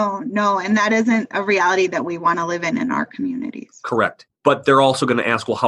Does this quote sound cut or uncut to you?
cut